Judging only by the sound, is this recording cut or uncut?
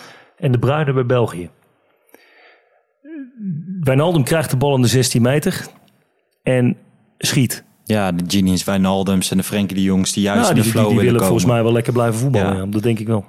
cut